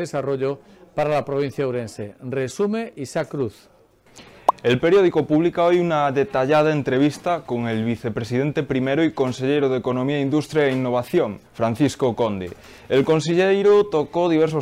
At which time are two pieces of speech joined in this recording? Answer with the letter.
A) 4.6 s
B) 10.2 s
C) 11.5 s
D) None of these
C